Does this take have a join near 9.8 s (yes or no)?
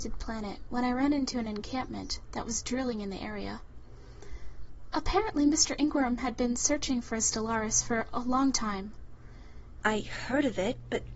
yes